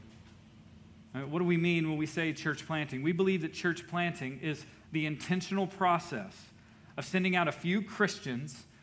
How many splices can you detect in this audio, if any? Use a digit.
0